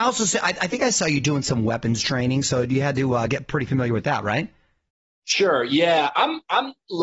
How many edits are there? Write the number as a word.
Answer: zero